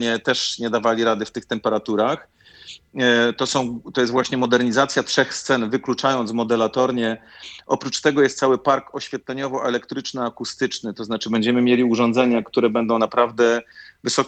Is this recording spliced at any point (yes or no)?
no